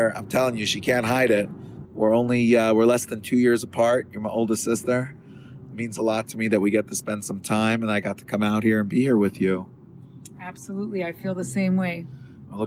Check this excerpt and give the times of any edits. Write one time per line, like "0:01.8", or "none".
0:01.8
0:05.7

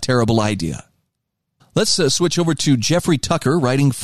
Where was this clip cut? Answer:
0:01.6

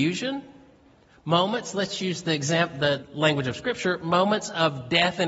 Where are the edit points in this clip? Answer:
0:03.0

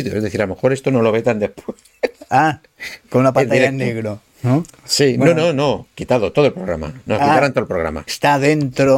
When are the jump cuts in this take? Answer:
0:03.0
0:08.1

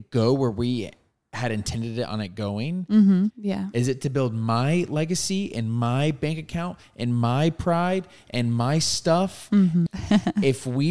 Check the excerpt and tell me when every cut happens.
0:03.3
0:09.9

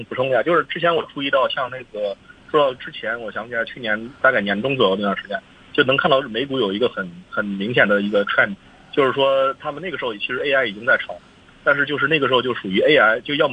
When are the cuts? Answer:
none

